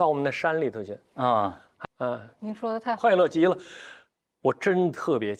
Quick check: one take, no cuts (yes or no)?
no